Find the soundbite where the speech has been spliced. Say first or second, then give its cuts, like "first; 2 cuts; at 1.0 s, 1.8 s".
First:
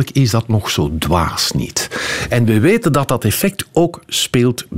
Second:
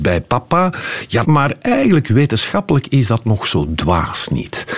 second; 1 cut; at 1.2 s